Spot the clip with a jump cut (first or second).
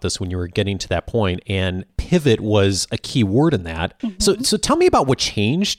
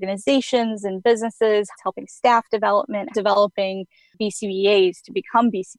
second